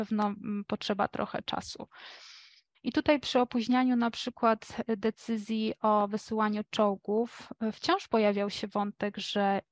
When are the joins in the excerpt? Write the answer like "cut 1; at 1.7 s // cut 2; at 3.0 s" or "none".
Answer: cut 1; at 2.7 s